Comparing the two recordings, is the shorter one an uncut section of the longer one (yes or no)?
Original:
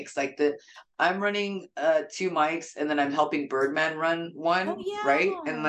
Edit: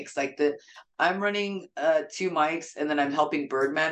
yes